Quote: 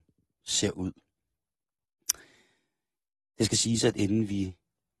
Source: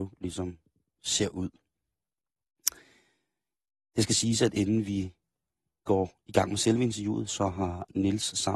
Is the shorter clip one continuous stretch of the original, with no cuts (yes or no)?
yes